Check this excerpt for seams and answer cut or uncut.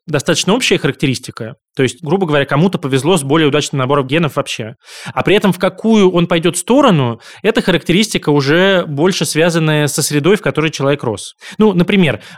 uncut